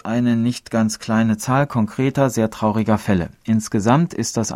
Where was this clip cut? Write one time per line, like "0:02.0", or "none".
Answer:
none